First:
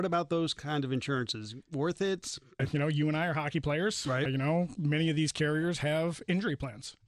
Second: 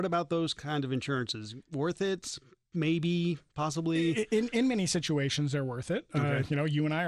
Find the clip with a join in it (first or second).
first